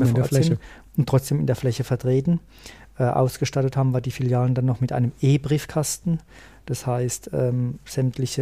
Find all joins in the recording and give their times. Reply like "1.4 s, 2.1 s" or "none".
none